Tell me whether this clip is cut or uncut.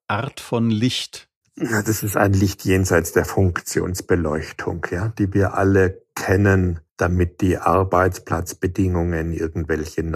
cut